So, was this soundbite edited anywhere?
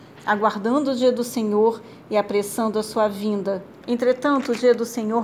yes; 1 cut; at 3.8 s

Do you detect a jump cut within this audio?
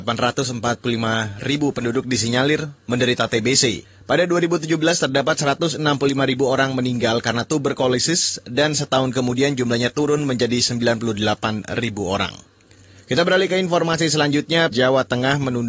yes; 1 cut; at 14.7 s

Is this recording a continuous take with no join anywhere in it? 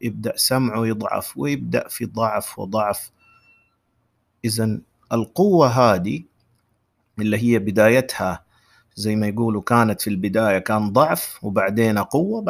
no; 1 cut; at 2.6 s

